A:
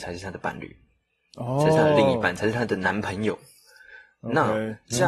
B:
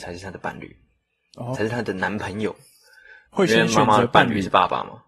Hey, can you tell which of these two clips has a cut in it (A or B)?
B